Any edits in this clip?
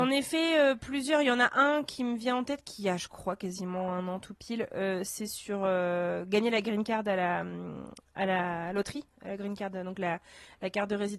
no; 0 cuts

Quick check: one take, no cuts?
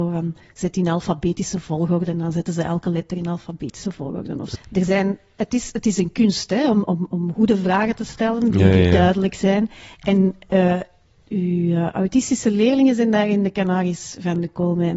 no; 1 cut; at 4.5 s

